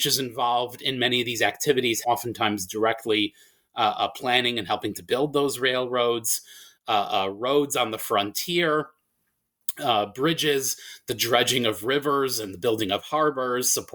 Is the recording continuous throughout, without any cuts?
no; 1 cut; at 2.0 s

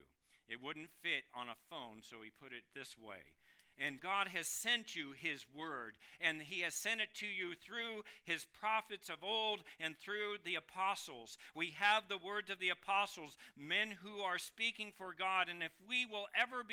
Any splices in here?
yes; 1 cut; at 4.0 s

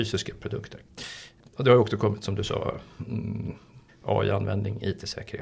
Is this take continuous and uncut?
no; 1 cut; at 3.9 s

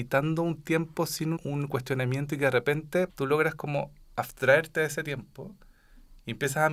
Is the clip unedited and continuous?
no; 2 cuts; at 1.4 s, 3.1 s

